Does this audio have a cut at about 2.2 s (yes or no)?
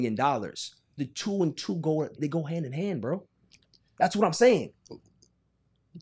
yes